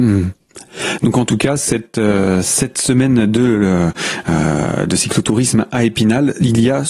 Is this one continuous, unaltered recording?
yes; 0 cuts

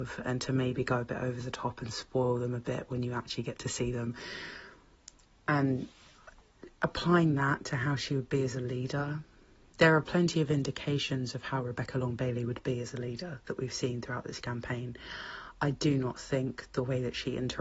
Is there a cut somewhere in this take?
no; 0 cuts

